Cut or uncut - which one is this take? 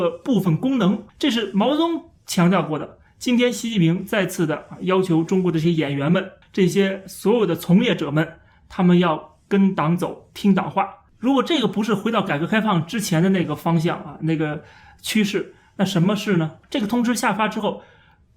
cut